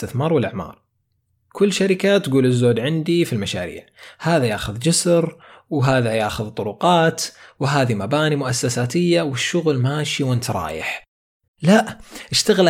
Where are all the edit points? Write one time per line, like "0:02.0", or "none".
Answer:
0:11.5